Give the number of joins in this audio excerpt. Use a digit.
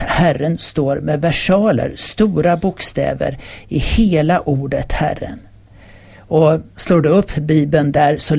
0